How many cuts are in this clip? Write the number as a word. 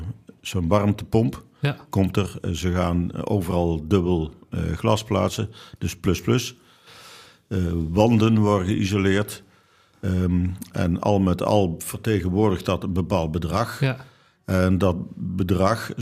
zero